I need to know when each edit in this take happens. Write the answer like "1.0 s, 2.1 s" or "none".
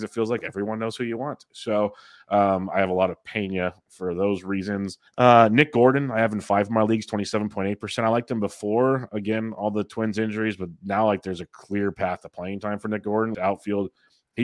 5.1 s, 13.3 s